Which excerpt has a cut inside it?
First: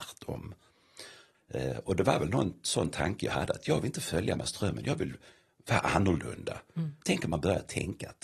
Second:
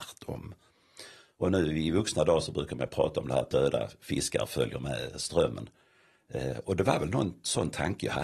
first; 2 cuts; at 1.3 s, 7.0 s

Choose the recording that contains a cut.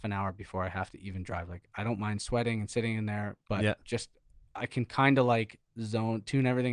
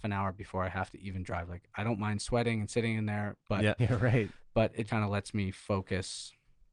second; 2 cuts; at 3.8 s, 4.9 s

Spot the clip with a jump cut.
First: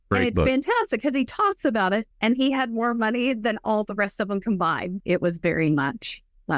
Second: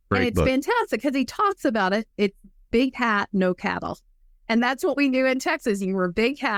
first; 2 cuts; at 2.1 s, 5.0 s

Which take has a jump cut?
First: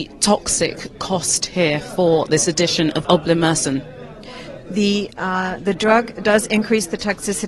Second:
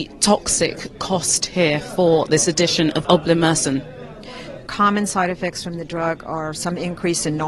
second; 1 cut; at 4.7 s

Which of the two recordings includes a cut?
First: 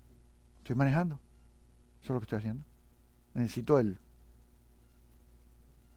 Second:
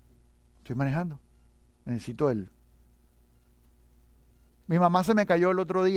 second; 1 cut; at 1.7 s

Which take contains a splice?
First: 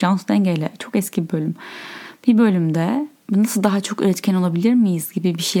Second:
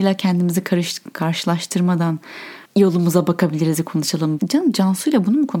second; 2 cuts; at 2.6 s, 4.4 s

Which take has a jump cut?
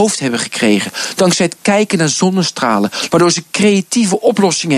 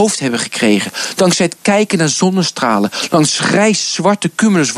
first; 1 cut; at 3.1 s

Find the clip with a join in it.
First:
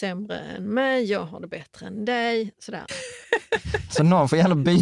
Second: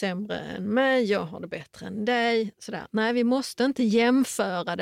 first; 1 cut; at 2.9 s

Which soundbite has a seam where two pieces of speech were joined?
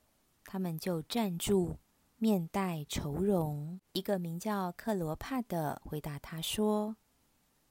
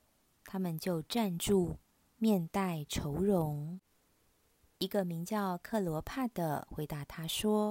first; 1 cut; at 3.9 s

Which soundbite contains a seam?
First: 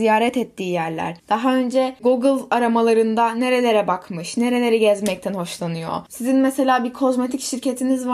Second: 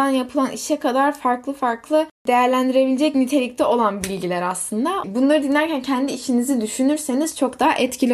second; 1 cut; at 5.0 s

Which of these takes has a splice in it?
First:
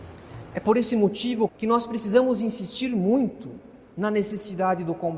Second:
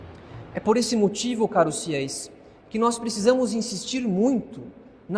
first; 1 cut; at 1.5 s

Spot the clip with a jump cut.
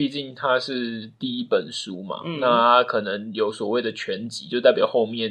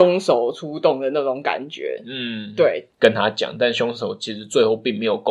second; 1 cut; at 2.9 s

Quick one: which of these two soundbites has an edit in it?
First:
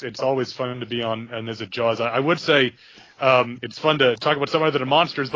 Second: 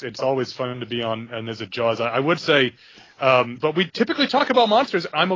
second; 1 cut; at 3.6 s

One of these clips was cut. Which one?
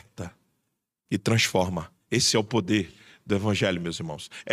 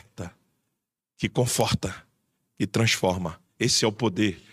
first; 1 cut; at 1.0 s

